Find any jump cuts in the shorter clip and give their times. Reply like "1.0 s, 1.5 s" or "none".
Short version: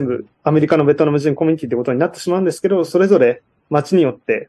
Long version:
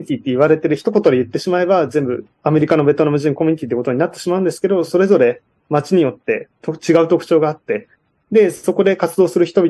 none

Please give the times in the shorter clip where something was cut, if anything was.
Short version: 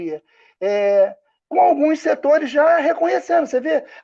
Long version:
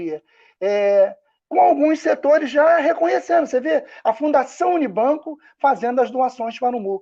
none

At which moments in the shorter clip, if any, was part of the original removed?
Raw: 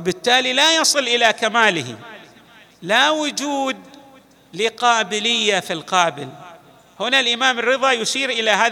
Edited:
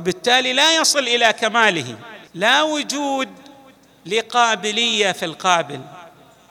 2.3 s

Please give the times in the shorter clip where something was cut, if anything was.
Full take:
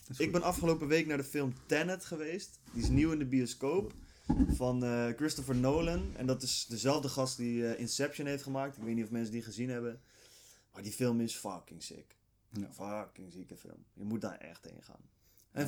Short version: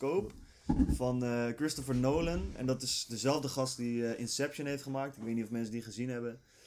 none

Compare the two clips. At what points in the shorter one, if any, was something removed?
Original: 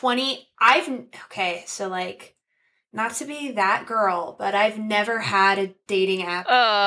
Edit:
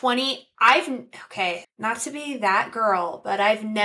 1.6 s

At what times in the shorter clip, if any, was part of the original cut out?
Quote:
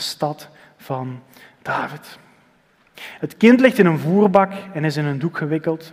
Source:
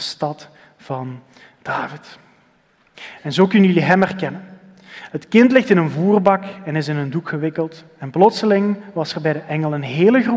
3.2 s

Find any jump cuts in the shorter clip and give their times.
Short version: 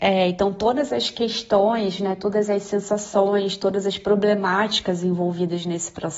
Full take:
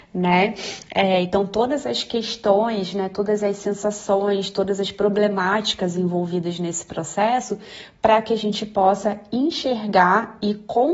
none

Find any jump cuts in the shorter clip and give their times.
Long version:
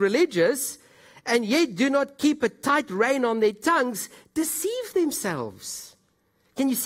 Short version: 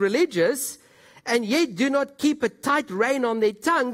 none

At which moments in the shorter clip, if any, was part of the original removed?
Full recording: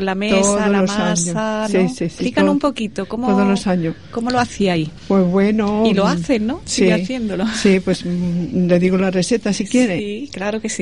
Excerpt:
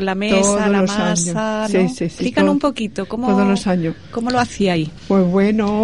none

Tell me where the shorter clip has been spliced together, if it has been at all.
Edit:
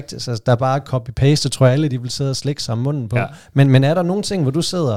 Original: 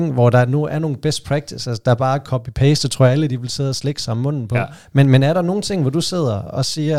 none

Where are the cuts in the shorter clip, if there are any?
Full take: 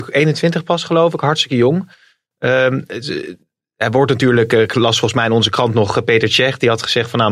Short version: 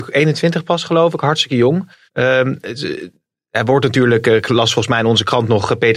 2.1 s

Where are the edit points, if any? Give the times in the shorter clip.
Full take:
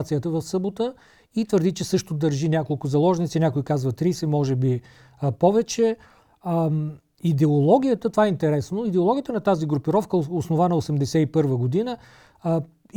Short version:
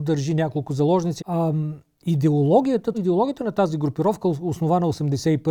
1.2 s, 2.9 s

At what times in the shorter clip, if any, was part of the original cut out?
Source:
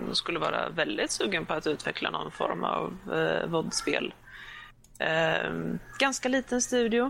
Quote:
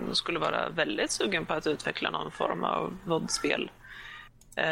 3.1 s

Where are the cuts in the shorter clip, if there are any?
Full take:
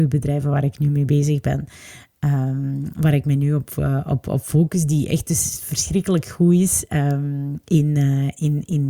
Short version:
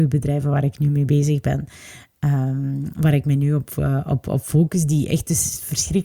none

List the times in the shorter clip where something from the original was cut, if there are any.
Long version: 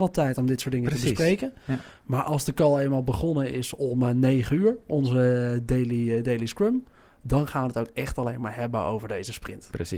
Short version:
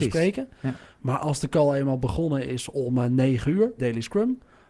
3.8 s

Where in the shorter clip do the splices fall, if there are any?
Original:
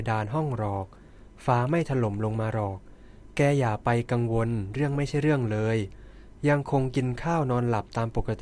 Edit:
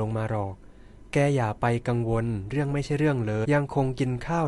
3.4 s

